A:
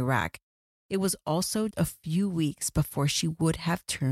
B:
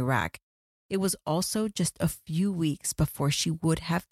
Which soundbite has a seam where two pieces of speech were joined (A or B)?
A